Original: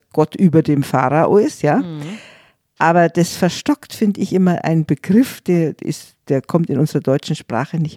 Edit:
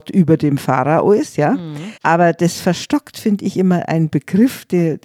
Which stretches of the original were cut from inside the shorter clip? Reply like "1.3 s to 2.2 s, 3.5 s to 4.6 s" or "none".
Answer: 2.2 s to 2.7 s

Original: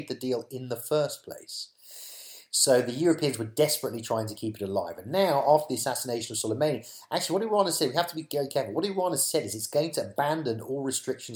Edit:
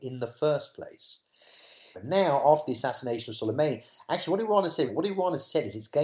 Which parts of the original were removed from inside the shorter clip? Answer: 2.4 s to 5.0 s, 7.9 s to 8.7 s

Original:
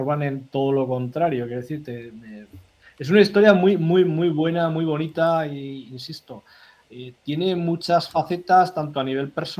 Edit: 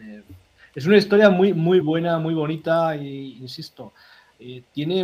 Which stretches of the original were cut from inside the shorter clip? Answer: 4.0 s to 4.3 s

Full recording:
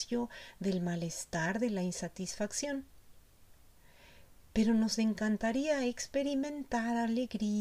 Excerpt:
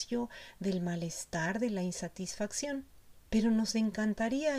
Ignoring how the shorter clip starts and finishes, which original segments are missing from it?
3.3 s to 4.5 s

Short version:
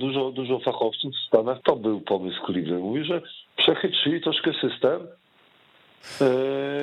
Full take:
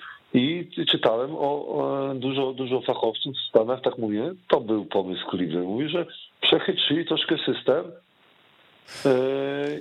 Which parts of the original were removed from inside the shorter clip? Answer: 3.8 s to 4.4 s

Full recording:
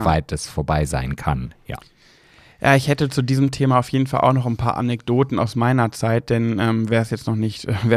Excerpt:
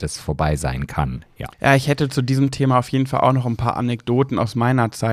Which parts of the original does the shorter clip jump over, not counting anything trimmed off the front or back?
1.8 s to 2.5 s

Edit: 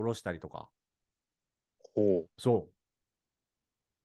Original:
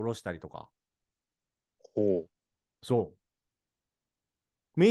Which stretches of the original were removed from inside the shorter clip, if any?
2.3 s to 2.8 s

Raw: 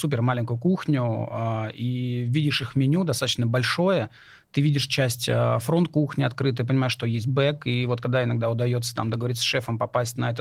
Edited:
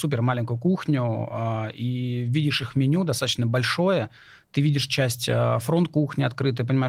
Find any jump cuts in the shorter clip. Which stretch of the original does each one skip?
none

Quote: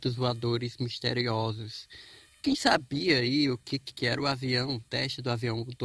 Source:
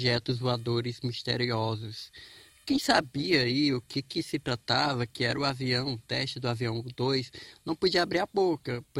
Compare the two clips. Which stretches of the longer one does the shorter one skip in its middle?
4.1 s to 5.1 s

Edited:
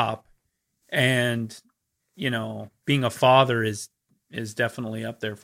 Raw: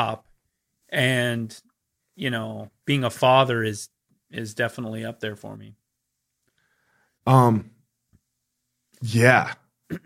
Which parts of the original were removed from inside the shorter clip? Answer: none

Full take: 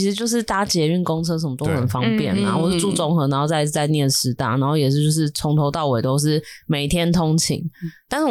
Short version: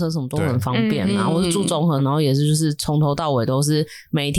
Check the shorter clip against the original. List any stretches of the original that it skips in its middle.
3.3 s to 4.5 s

